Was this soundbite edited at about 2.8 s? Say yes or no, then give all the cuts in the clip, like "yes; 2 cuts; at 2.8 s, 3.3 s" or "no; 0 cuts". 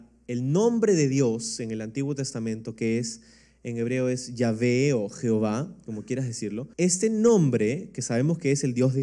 no; 1 cut; at 6.7 s